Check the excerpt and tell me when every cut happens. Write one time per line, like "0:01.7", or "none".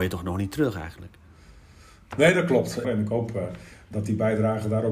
0:02.8